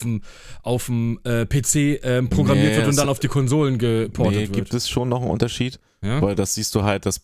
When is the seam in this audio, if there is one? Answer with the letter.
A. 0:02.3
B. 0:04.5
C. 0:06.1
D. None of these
D